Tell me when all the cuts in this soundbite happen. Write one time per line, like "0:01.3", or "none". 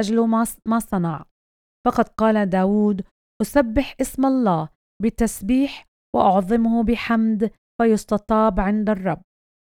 none